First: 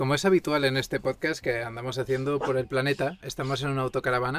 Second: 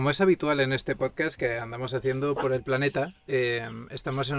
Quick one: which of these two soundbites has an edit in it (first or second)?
first